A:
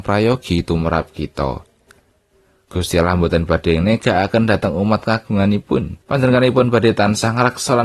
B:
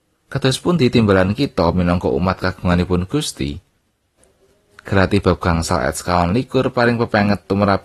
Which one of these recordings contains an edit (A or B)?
A